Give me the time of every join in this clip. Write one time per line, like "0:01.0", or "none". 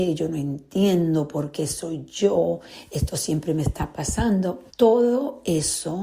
0:04.7

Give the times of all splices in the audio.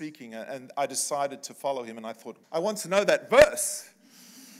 0:02.4

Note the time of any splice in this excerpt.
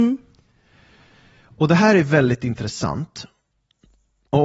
none

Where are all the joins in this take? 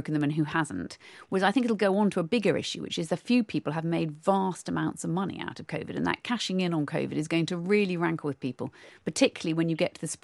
none

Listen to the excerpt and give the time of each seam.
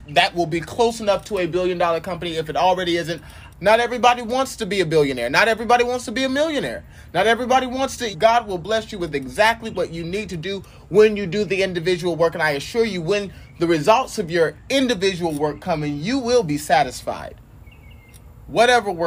0:03.5
0:08.1

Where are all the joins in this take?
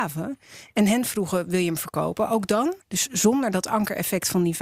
0:02.8

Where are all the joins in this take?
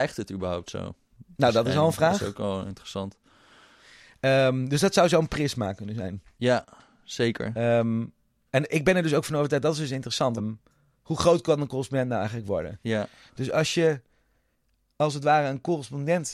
0:10.4
0:12.8

